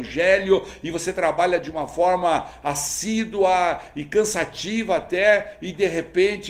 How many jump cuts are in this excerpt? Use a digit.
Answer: 0